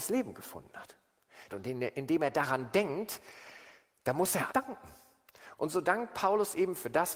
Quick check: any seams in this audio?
yes; 3 cuts; at 1.5 s, 4.5 s, 5.6 s

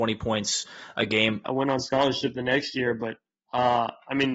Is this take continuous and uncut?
no; 1 cut; at 1.4 s

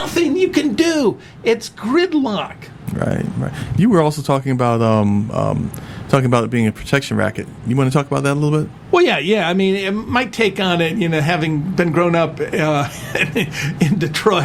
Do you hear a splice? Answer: no; 0 cuts

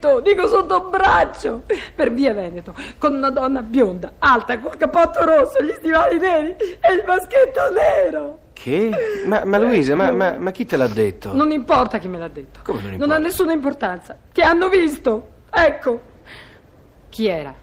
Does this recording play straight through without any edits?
yes; 0 cuts

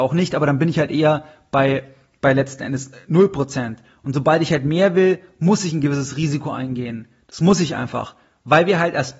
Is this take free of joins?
yes; 0 cuts

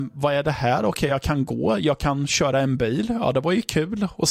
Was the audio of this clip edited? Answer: no; 0 cuts

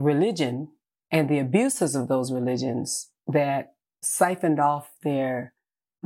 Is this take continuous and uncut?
yes; 0 cuts

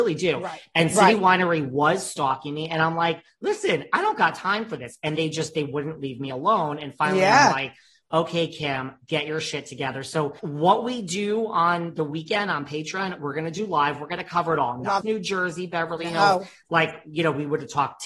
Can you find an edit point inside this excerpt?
yes; 2 cuts; at 10.4 s, 15.0 s

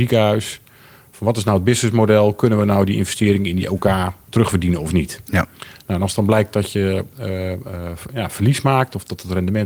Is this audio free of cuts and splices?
yes; 0 cuts

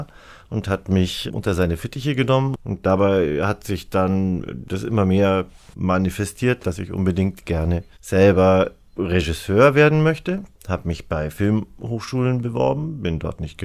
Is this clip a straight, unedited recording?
no; 2 cuts; at 2.6 s, 10.6 s

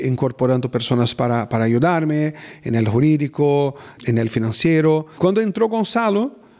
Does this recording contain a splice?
yes; 1 cut; at 4.0 s

